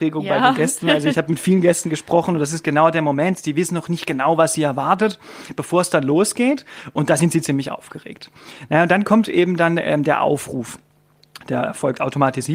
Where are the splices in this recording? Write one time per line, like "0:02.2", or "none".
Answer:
none